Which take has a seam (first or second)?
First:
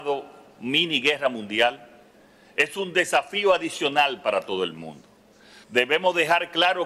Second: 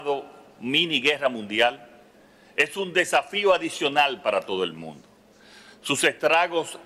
first